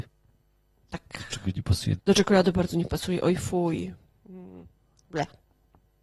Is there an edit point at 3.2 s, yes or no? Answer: no